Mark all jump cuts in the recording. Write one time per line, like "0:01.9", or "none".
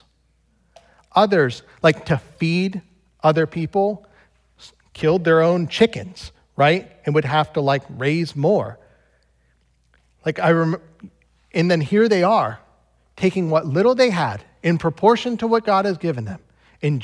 none